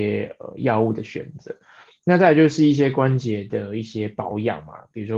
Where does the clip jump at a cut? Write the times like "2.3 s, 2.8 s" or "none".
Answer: none